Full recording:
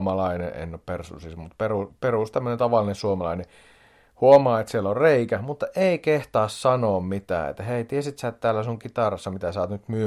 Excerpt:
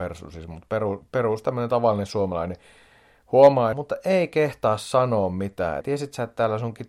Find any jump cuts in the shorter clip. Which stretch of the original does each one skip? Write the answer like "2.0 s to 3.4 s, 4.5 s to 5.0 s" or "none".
4.6 s to 5.4 s, 7.5 s to 7.9 s